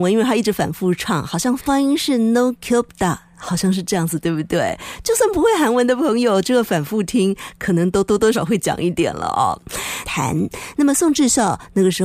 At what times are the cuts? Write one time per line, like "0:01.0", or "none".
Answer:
0:08.3
0:10.0